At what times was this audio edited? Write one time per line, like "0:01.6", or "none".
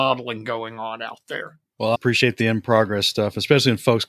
0:01.9